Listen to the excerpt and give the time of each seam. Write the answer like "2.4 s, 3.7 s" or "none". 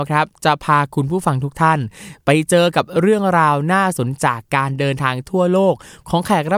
4.2 s